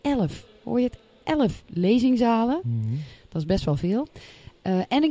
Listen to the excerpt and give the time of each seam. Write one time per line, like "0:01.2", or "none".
none